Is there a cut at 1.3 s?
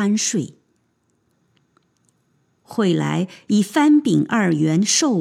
yes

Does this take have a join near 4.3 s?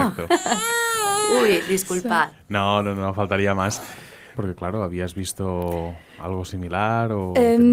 yes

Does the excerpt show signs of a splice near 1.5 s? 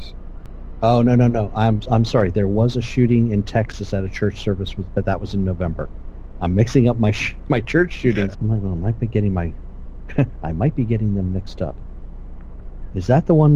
no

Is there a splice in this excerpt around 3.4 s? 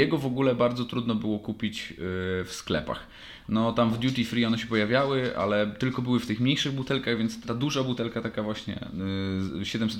no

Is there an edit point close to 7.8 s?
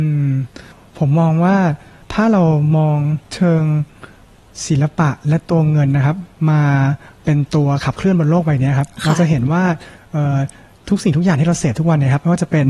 no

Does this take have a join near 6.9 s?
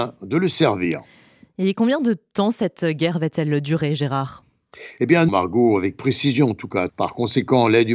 yes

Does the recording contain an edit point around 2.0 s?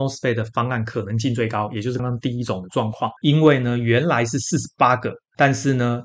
yes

